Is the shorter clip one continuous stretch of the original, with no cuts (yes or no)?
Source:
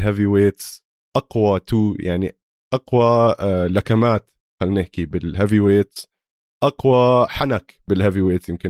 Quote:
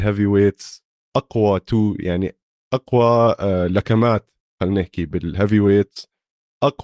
yes